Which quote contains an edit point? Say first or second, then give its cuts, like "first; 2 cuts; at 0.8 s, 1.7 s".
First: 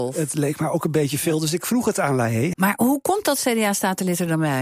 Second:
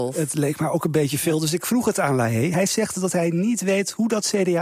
first; 1 cut; at 2.5 s